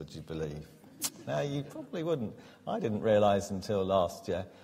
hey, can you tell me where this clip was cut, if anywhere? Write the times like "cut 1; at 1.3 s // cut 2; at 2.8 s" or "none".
none